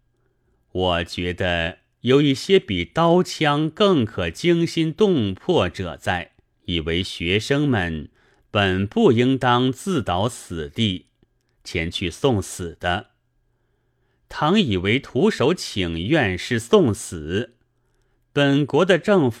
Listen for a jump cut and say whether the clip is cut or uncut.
cut